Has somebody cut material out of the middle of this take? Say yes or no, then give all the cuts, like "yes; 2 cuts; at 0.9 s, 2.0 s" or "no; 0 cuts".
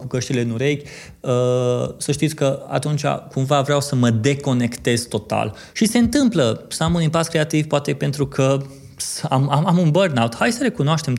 yes; 1 cut; at 5.7 s